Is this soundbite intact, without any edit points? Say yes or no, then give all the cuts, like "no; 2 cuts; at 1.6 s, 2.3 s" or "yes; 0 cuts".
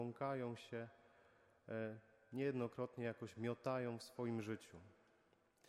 yes; 0 cuts